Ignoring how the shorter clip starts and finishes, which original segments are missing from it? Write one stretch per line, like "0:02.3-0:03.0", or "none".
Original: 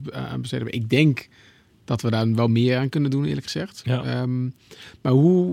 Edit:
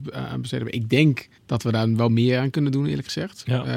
0:01.4-0:01.8